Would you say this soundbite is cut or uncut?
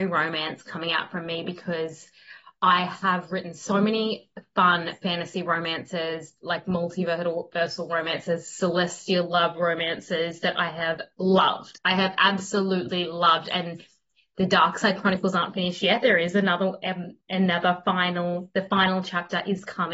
uncut